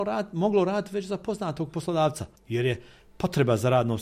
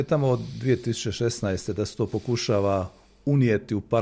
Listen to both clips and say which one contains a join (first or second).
first